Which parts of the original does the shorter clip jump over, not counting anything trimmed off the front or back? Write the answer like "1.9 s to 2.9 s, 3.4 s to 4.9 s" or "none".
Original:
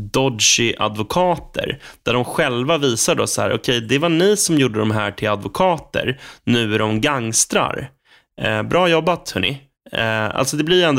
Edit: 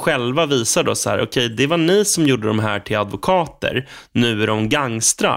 none